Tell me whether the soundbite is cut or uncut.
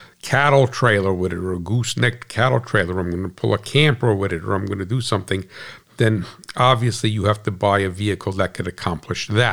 uncut